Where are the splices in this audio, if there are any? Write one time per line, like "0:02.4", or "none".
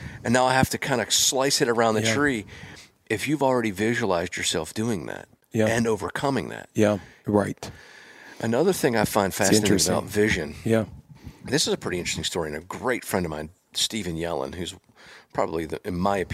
0:07.2